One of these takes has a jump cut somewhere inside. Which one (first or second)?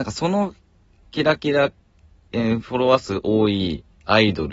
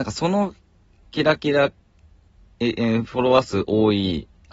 first